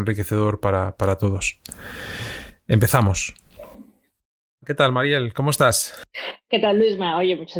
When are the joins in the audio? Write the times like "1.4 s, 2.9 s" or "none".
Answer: none